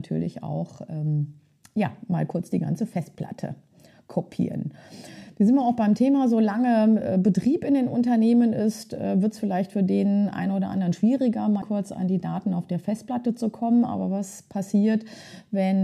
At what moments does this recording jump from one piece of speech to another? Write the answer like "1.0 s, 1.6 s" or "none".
11.6 s

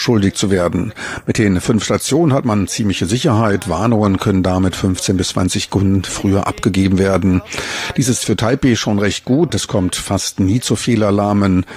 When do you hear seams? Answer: 9.5 s

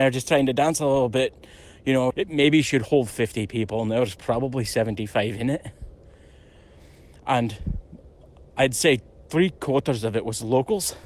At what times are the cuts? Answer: 2.1 s

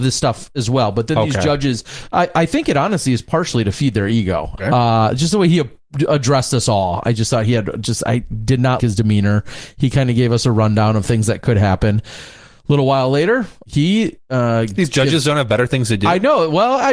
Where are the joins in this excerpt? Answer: 4.6 s, 8.8 s, 13.6 s

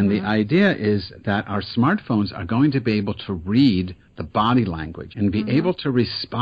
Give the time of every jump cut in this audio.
5.1 s

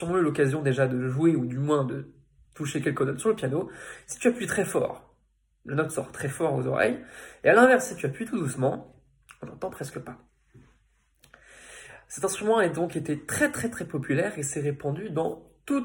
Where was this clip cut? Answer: none

